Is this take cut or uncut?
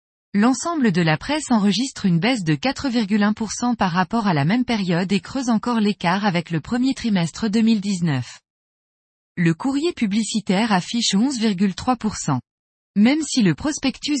uncut